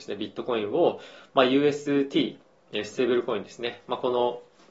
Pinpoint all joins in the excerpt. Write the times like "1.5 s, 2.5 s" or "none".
none